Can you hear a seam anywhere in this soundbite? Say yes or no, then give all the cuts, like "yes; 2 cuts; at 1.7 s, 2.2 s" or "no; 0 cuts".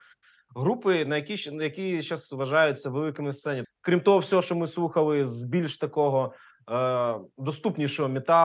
yes; 1 cut; at 3.6 s